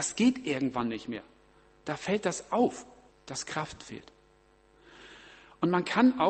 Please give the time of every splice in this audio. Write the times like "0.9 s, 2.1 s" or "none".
3.1 s